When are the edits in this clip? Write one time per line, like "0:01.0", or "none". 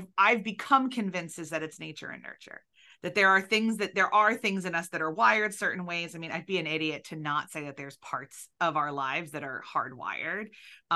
none